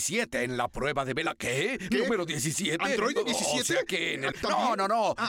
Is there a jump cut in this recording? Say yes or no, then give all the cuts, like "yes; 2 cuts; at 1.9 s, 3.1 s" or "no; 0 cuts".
yes; 1 cut; at 4.3 s